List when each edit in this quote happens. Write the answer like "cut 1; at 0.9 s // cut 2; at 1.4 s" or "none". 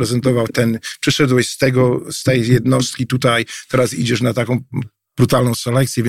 none